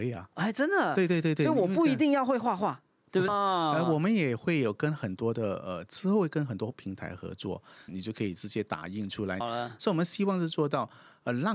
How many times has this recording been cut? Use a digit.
3